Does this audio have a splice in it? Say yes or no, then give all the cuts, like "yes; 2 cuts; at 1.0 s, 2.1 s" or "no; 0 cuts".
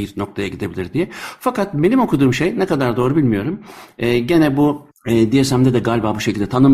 no; 0 cuts